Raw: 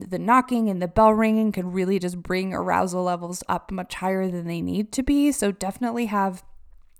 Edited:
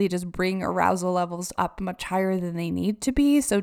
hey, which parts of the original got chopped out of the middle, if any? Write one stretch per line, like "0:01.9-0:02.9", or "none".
none